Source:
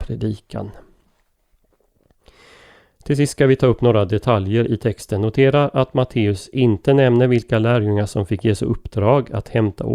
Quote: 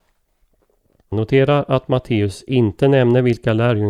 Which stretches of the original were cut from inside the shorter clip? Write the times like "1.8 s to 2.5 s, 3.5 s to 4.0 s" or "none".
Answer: 2.2 s to 5.2 s